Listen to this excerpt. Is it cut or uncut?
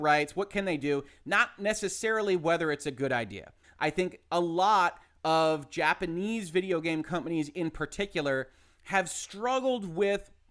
cut